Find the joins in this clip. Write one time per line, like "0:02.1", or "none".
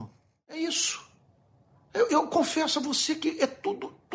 0:02.1